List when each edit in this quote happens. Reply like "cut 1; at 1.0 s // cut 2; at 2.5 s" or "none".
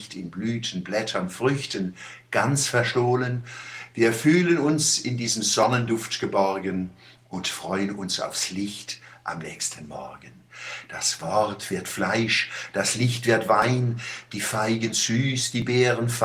none